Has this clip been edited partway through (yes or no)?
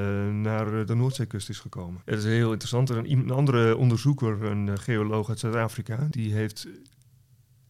yes